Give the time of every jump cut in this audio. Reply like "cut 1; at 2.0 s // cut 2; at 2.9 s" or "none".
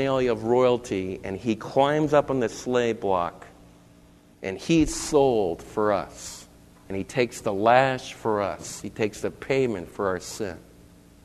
cut 1; at 4.3 s